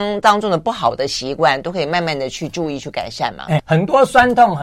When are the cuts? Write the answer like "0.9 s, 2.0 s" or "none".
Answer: 3.6 s